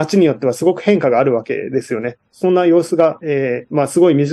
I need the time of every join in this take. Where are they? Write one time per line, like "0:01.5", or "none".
0:02.3

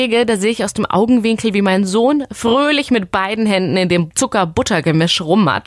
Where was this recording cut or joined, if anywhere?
none

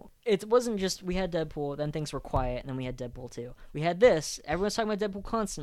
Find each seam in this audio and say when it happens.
none

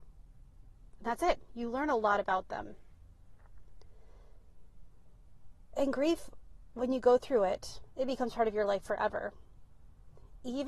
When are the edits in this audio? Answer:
0:01.5

